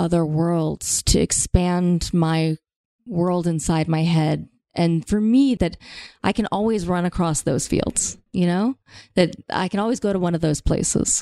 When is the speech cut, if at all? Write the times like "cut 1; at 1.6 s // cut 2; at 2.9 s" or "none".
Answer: cut 1; at 5.6 s